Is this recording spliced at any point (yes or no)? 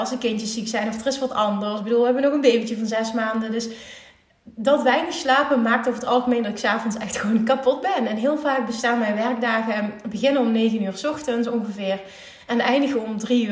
no